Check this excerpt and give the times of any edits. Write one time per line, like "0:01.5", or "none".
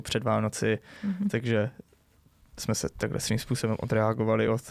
none